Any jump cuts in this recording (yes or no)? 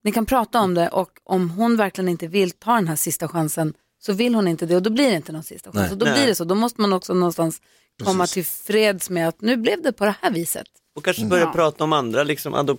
no